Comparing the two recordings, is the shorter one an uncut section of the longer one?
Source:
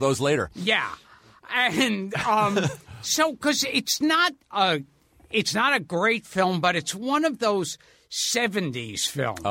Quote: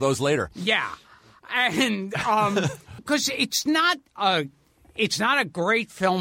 no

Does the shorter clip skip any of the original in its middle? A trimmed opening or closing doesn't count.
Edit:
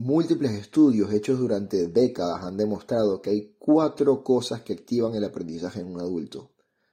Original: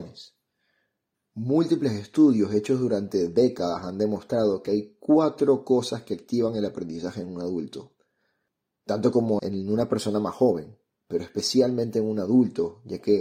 no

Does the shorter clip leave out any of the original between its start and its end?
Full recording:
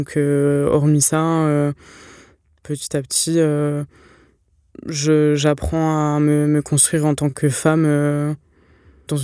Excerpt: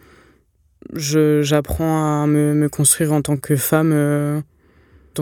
no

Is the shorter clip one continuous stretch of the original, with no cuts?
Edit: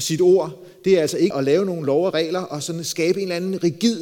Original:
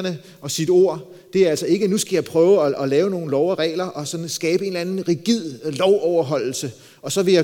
no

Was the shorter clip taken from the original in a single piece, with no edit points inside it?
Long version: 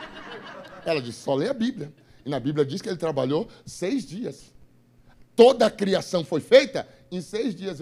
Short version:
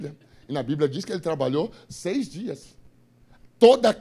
yes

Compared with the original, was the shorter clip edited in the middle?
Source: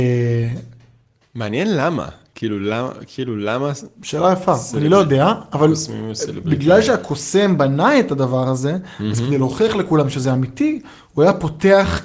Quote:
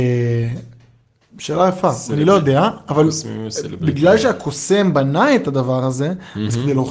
yes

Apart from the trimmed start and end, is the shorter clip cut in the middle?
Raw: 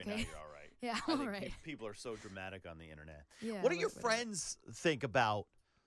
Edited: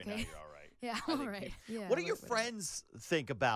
yes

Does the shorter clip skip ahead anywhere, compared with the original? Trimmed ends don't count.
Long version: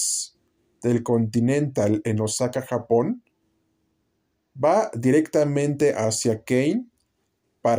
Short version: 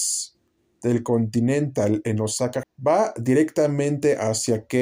yes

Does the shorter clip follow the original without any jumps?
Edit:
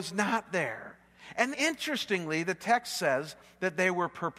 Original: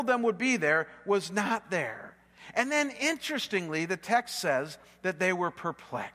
no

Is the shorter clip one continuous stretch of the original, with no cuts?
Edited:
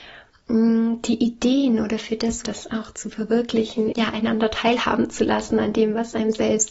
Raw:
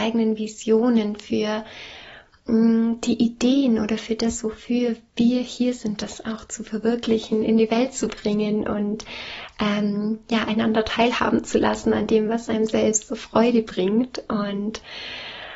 no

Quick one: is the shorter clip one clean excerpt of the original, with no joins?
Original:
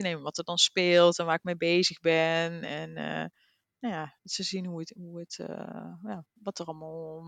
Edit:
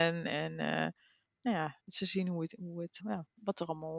no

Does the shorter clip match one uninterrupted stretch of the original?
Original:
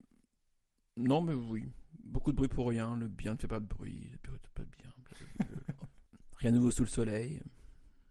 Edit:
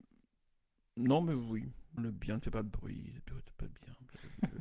no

